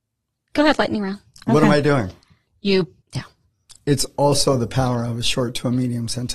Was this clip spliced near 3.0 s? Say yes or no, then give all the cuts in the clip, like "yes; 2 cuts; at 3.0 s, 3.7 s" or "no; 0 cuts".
yes; 1 cut; at 3.0 s